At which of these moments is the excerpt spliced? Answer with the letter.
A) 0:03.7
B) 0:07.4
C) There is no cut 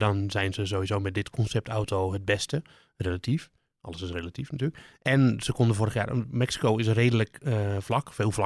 C